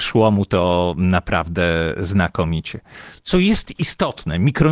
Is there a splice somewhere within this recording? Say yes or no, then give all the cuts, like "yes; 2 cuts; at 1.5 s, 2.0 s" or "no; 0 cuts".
no; 0 cuts